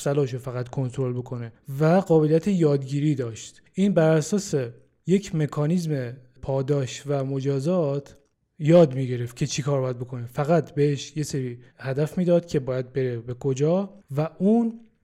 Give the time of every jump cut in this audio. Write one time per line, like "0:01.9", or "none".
0:11.7